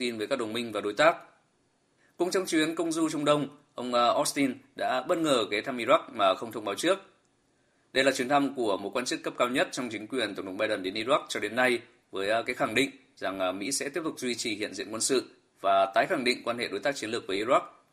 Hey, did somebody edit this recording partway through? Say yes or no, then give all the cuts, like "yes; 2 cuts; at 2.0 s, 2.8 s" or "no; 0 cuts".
no; 0 cuts